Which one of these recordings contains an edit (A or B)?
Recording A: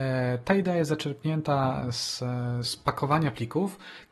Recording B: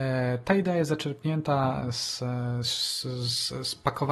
A